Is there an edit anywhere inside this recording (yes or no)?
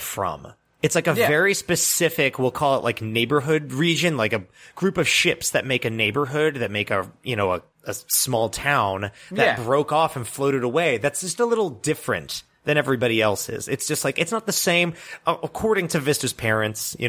no